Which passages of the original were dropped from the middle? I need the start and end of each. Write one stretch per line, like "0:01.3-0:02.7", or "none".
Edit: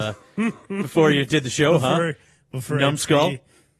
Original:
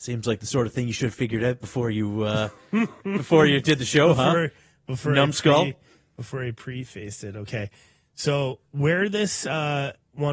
none